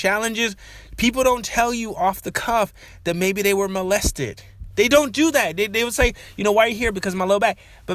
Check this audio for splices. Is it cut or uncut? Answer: uncut